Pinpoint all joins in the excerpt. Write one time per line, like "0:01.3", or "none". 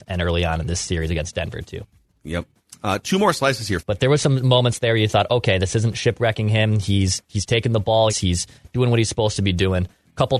0:03.8
0:08.1